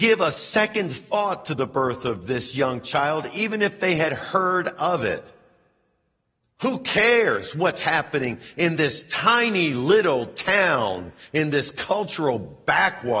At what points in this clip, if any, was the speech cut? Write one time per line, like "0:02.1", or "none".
none